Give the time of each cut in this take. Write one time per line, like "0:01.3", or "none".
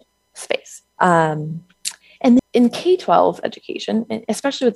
0:01.0
0:02.4